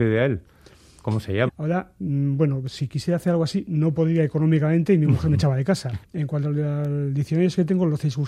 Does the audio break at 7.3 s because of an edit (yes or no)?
no